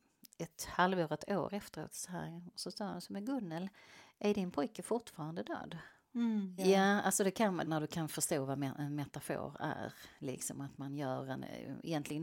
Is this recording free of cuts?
no; 2 cuts; at 6.6 s, 7.7 s

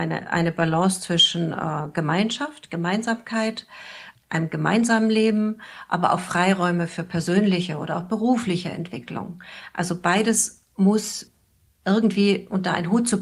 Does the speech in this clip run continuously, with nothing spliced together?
yes; 0 cuts

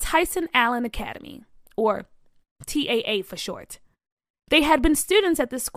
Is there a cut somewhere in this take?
no; 0 cuts

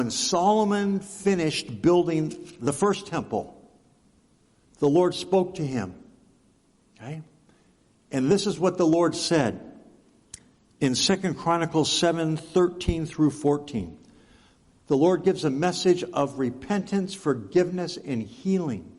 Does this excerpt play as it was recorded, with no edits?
yes; 0 cuts

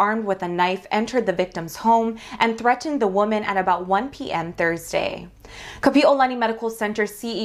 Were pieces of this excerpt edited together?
yes; 1 cut; at 5.8 s

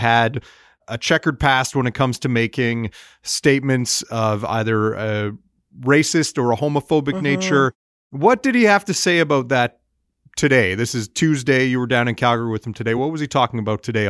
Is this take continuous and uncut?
yes; 0 cuts

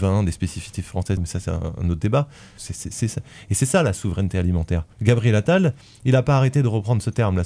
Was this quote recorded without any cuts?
no; 3 cuts; at 1.2 s, 2.6 s, 4.9 s

